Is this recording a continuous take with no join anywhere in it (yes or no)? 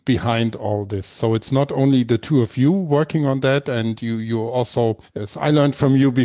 yes